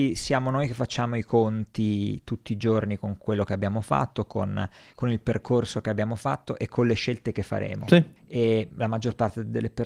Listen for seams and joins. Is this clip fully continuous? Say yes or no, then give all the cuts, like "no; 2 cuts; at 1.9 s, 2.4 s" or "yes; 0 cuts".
no; 1 cut; at 8.2 s